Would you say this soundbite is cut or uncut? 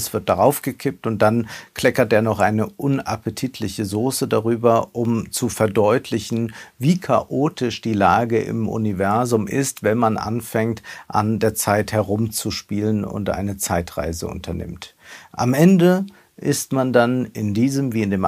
uncut